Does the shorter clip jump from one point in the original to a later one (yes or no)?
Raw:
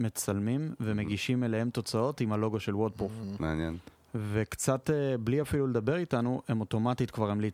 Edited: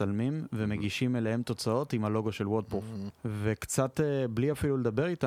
yes